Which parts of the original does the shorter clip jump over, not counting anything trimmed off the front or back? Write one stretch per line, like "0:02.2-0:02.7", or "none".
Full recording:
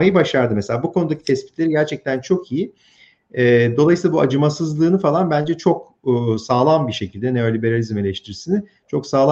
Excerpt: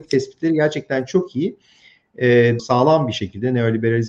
0:03.8-0:06.4